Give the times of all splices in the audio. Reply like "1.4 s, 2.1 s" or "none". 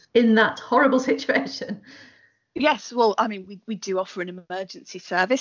none